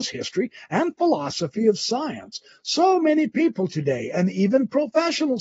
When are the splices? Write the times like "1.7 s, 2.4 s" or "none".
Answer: none